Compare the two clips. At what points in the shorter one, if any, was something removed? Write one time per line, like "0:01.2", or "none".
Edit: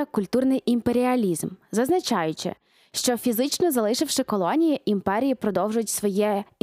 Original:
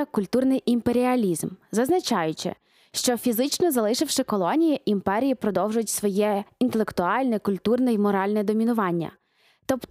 none